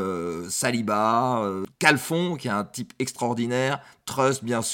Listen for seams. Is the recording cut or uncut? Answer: uncut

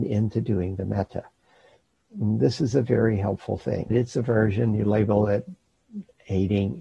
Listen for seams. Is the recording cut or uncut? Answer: cut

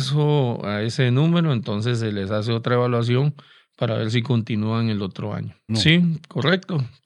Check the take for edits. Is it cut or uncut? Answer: cut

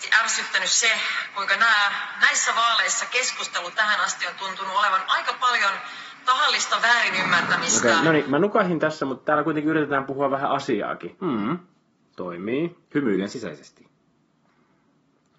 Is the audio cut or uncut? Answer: cut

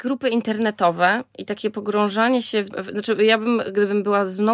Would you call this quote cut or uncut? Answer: cut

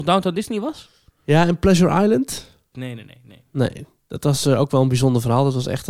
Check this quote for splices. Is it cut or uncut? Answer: cut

